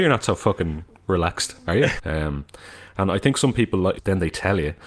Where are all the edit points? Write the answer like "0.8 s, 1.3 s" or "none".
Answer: 2.0 s, 3.9 s